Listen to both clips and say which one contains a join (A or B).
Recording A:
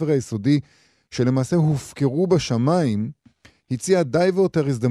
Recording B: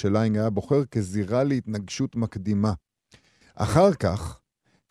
B